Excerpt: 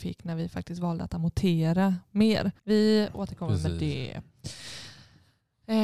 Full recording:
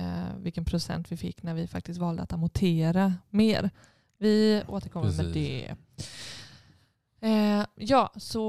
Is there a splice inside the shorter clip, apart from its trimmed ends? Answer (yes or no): yes